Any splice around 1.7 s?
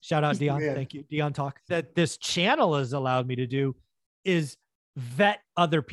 yes; 1 cut; at 1.7 s

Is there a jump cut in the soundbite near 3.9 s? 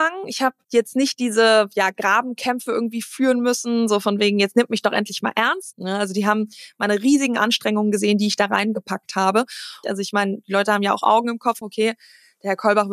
no; 3 cuts; at 5.7 s, 9.8 s, 11.6 s

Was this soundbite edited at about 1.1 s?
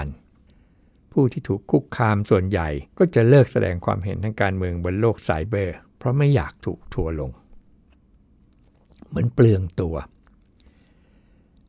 no; 1 cut; at 2.9 s

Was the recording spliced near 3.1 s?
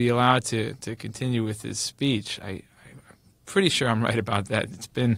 no; 0 cuts

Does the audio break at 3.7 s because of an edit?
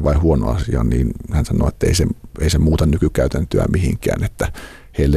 no; 1 cut; at 1.3 s

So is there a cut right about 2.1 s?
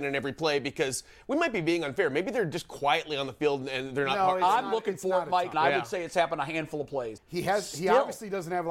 no; 2 cuts; at 5.5 s, 7.2 s

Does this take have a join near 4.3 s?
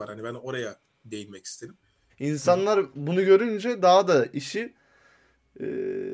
no; 1 cut; at 2.1 s

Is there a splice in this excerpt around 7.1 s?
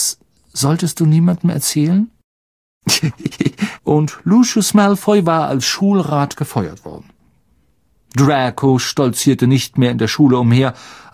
no; 1 cut; at 3.8 s

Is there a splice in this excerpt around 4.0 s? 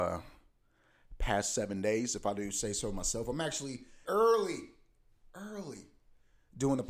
yes; 1 cut; at 4.0 s

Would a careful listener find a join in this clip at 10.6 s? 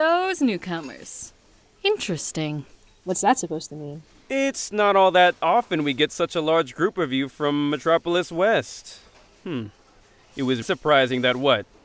yes; 1 cut; at 10.6 s

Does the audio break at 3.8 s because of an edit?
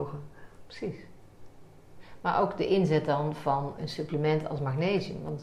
yes; 1 cut; at 3.8 s

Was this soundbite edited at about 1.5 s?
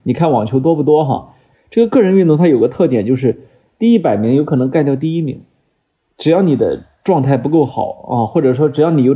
yes; 1 cut; at 1.5 s

